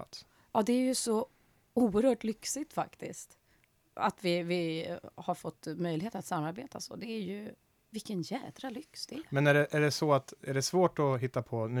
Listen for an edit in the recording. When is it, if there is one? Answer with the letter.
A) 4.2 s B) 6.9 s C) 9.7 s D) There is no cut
D